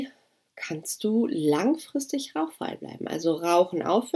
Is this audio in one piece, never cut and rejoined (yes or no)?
yes